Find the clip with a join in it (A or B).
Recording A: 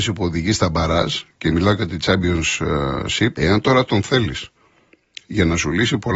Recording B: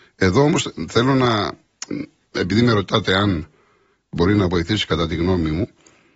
A